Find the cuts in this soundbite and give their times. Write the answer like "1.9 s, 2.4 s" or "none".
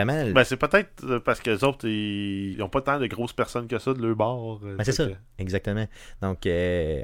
2.5 s